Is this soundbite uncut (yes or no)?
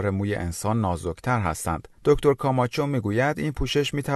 no